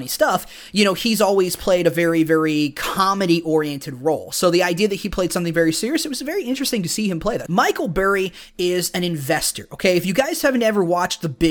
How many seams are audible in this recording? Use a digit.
1